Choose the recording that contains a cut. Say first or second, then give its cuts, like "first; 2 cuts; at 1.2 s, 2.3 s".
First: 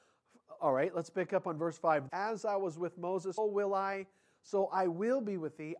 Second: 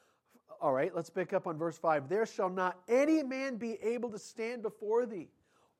first; 2 cuts; at 2.1 s, 3.4 s